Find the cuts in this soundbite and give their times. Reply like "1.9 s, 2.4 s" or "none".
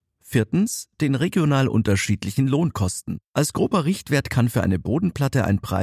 3.3 s